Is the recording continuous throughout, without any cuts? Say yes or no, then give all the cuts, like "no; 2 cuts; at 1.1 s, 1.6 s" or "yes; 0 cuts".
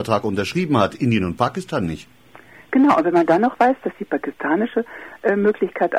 yes; 0 cuts